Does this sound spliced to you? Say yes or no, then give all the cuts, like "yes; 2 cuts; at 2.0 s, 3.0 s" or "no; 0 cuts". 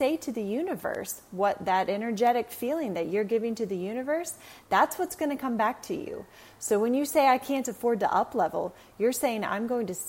no; 0 cuts